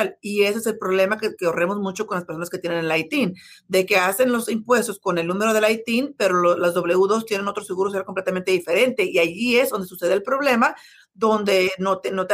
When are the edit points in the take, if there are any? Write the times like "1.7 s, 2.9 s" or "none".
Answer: none